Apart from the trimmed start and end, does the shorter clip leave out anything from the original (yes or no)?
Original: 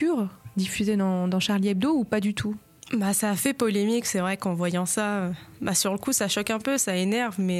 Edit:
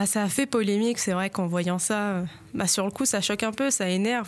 no